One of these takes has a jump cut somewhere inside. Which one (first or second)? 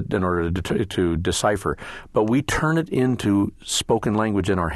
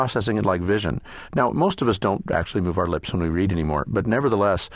second